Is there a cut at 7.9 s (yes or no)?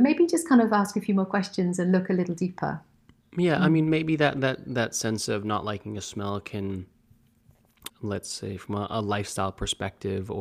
yes